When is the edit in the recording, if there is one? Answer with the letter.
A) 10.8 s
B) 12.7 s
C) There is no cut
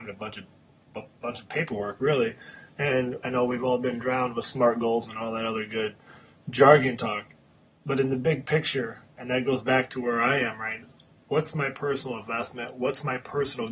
A